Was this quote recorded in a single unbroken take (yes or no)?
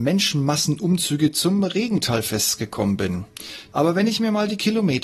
no